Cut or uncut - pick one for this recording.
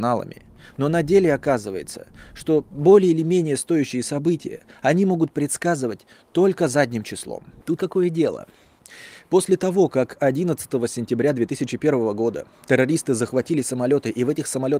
cut